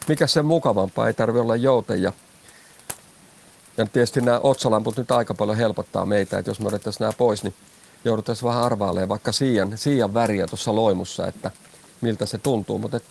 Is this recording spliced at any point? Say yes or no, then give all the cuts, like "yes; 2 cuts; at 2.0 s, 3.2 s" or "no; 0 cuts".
no; 0 cuts